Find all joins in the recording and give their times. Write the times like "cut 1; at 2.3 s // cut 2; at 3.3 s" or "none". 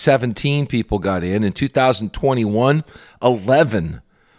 none